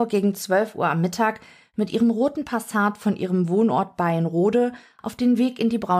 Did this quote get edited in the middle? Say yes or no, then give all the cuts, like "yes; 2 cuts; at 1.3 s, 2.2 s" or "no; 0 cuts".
no; 0 cuts